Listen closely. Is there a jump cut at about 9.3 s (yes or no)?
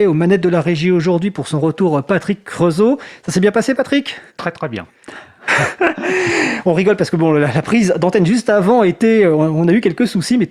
no